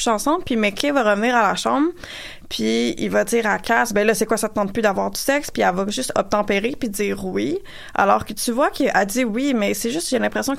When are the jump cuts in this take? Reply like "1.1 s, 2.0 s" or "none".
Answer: none